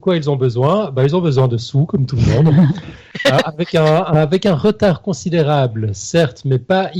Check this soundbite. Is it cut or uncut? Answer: uncut